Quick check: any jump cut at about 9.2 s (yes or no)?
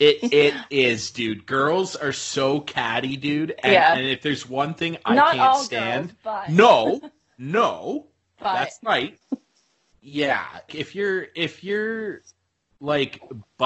yes